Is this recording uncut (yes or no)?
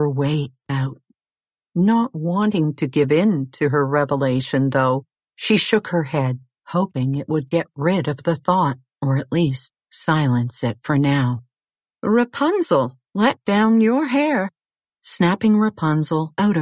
no